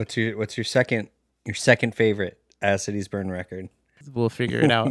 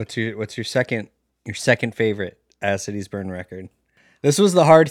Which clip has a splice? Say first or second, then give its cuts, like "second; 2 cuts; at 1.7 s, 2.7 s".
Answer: first; 1 cut; at 4.0 s